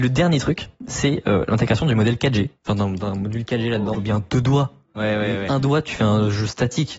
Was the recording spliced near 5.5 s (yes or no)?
no